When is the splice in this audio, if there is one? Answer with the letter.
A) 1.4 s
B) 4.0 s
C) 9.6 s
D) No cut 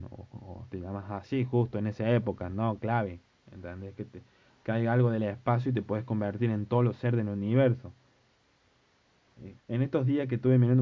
C